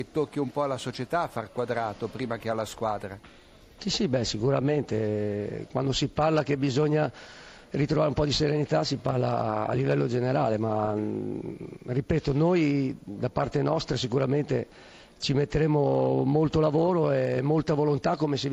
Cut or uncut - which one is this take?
uncut